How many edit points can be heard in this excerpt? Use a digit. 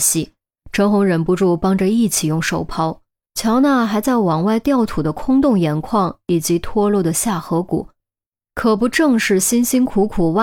1